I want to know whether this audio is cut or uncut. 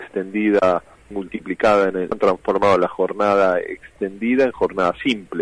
cut